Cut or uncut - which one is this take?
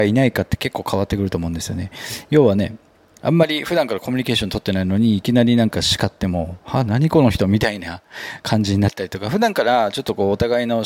uncut